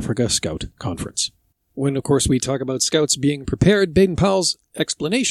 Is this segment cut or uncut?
uncut